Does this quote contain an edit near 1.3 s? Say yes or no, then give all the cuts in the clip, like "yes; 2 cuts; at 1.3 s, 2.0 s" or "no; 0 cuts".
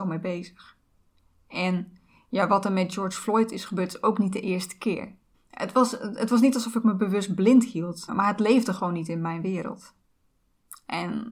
no; 2 cuts; at 5.3 s, 8.1 s